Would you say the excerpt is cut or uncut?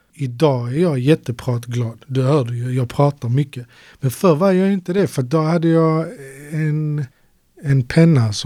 uncut